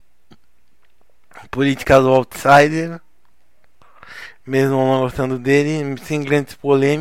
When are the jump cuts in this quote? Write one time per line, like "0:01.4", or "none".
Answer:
none